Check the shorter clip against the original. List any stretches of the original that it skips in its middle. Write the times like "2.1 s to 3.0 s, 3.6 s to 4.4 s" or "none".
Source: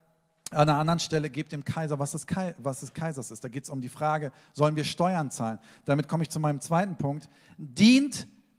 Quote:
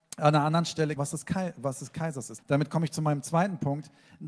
1.3 s to 2.0 s, 3.4 s to 5.8 s